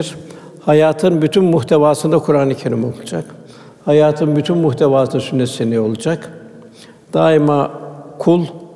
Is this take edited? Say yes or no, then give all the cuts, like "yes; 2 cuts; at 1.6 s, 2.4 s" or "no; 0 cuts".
no; 0 cuts